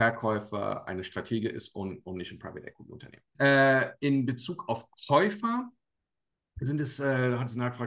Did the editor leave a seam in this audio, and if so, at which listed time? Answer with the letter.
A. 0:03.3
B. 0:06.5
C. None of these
A